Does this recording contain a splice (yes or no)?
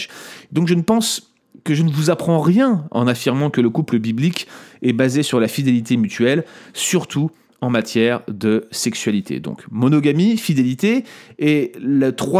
no